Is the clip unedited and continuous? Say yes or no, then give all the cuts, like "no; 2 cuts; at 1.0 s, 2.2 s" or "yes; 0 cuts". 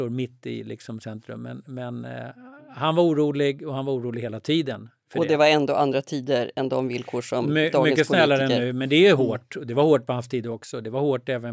yes; 0 cuts